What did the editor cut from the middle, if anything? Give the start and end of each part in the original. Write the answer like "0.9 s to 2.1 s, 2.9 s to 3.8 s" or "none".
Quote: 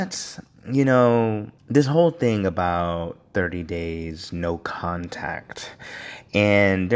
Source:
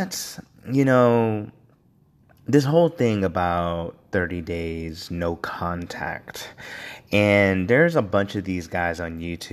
1.6 s to 2.4 s